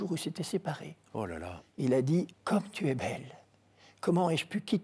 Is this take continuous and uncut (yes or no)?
no